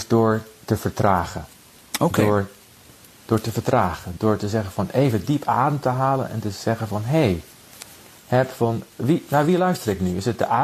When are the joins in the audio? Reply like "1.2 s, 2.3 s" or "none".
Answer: 8.2 s, 9.3 s